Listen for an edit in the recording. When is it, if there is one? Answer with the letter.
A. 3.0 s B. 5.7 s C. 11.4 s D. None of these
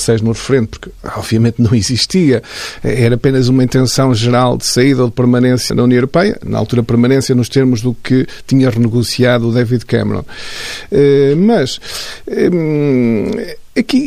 B